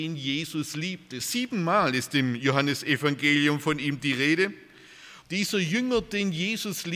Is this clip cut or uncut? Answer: cut